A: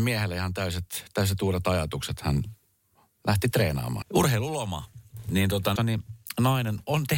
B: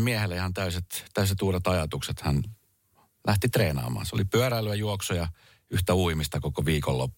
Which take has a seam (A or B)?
A